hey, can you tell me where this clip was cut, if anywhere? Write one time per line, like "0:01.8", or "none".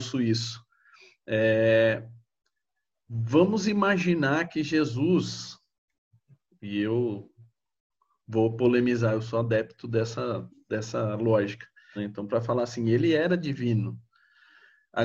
0:12.0

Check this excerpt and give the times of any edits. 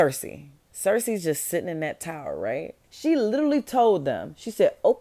0:02.8

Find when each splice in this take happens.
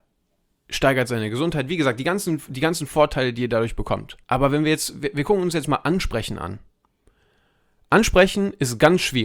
0:04.2

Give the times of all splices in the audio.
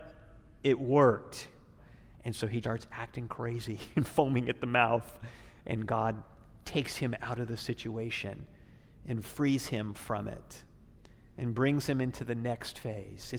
0:02.6

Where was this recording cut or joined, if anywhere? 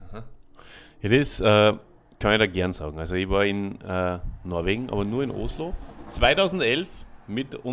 none

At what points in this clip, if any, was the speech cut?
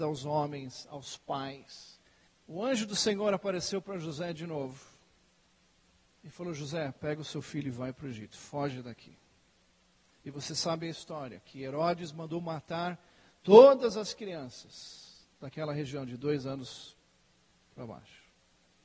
0:02.3

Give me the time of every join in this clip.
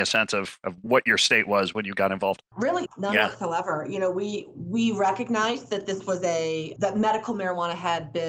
0:02.9

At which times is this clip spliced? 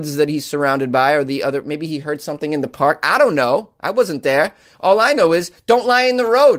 none

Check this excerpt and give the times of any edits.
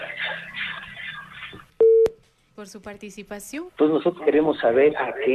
0:03.7

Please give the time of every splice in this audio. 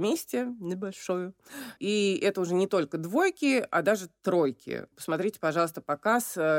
0:01.8
0:04.9

